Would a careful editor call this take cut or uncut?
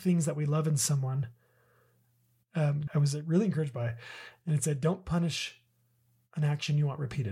cut